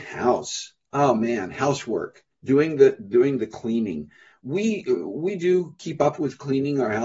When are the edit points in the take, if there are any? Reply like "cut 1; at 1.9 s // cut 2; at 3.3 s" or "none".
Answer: cut 1; at 2.3 s